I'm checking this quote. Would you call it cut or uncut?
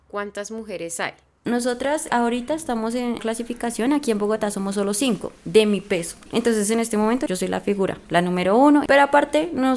cut